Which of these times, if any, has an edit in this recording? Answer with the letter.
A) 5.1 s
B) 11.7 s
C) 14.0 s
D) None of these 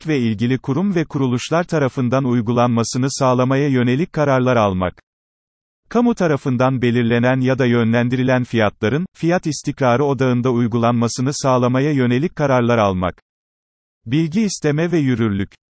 D